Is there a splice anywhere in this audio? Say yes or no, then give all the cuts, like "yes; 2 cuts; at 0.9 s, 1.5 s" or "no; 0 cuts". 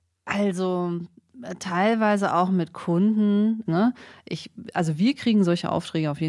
yes; 1 cut; at 3.7 s